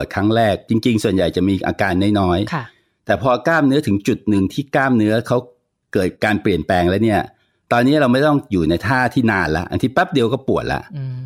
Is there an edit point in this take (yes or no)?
no